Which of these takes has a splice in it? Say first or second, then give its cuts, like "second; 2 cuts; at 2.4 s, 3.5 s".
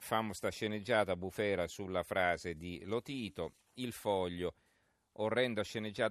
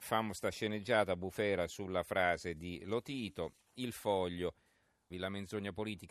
second; 1 cut; at 5.1 s